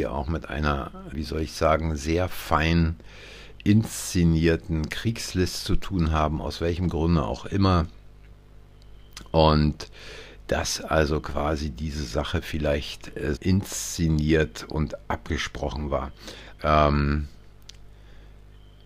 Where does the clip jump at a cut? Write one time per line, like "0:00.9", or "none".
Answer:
0:01.1
0:13.4
0:16.6